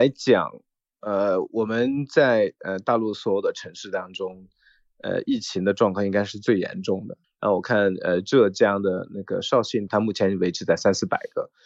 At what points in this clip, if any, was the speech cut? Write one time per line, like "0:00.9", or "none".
0:07.2
0:09.9

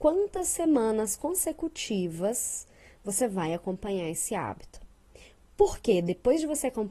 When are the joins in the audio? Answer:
none

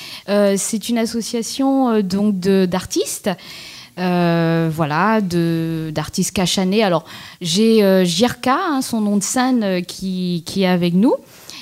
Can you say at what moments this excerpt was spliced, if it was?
none

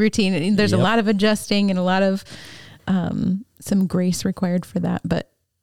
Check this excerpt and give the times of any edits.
0:03.5

